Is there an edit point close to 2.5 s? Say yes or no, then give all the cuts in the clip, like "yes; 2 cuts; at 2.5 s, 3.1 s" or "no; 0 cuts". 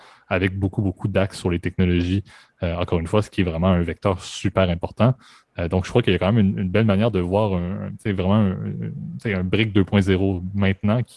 no; 0 cuts